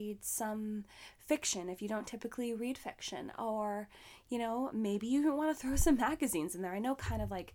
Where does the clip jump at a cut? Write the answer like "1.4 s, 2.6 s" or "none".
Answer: none

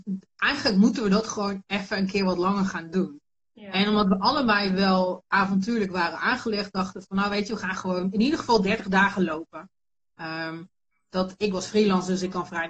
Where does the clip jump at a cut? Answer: none

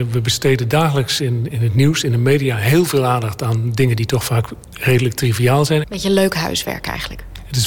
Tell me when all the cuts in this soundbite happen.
1.5 s, 5.8 s

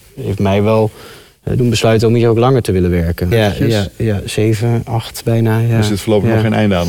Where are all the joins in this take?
3.3 s

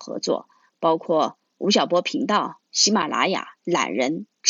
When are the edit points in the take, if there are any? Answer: 3.6 s

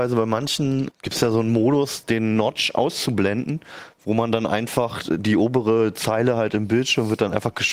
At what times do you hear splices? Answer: 0.9 s

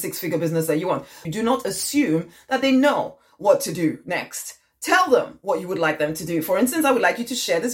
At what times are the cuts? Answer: 1.2 s

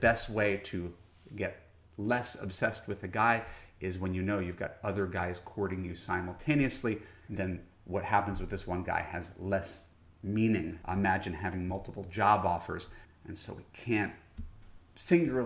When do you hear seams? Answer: 10.8 s, 13.0 s

